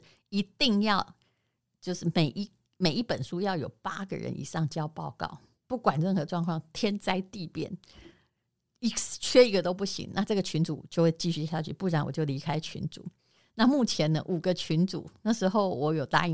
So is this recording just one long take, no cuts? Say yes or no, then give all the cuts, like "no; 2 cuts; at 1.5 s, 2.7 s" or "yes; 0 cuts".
yes; 0 cuts